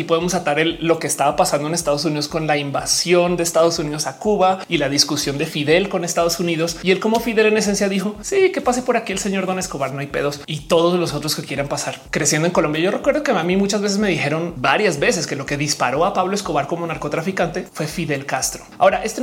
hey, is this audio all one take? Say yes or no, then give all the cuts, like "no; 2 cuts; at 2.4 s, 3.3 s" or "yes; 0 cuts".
yes; 0 cuts